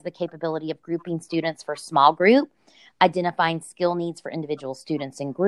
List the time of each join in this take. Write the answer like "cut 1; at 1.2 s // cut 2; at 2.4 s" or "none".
none

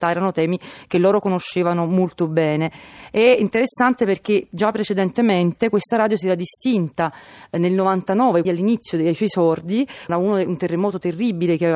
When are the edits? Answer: cut 1; at 8.4 s // cut 2; at 10.1 s

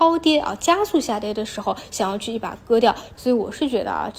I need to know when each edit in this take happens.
cut 1; at 3.1 s

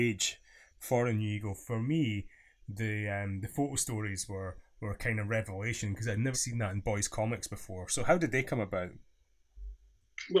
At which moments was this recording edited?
cut 1; at 6.3 s

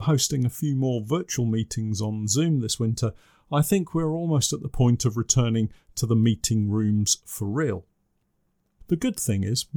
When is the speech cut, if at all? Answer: none

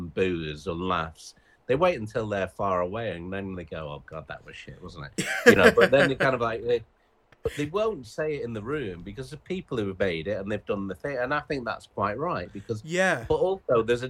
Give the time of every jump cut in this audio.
none

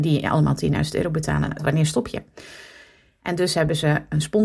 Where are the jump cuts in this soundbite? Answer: cut 1; at 1.6 s // cut 2; at 3.2 s

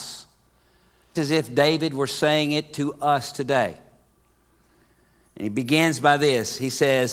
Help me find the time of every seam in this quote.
cut 1; at 1.2 s

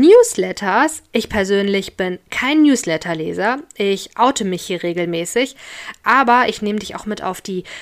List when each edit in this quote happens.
cut 1; at 6.0 s

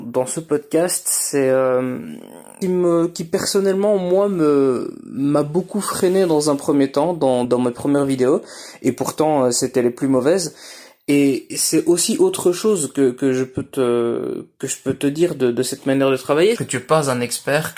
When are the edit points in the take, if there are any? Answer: cut 1; at 2.6 s // cut 2; at 7.4 s // cut 3; at 16.6 s

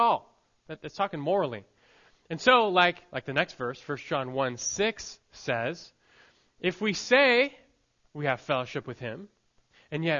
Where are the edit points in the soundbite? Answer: none

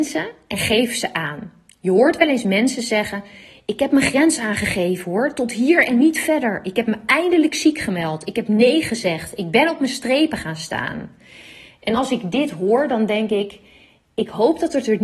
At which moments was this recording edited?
none

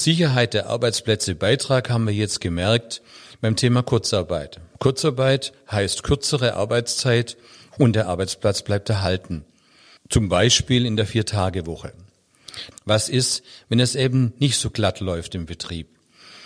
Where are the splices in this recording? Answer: cut 1; at 10.0 s // cut 2; at 12.7 s

